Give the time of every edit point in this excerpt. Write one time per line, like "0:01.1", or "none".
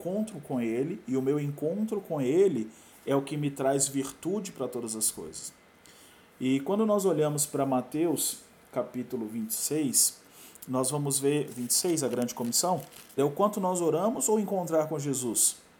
0:08.6
0:13.2